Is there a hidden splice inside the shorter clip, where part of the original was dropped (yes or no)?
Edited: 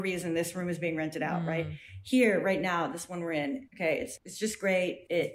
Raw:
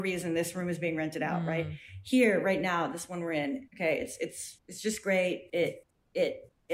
yes